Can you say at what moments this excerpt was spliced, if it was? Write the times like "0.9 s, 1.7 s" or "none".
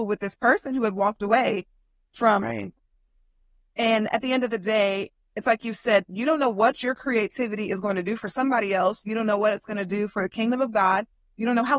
6.1 s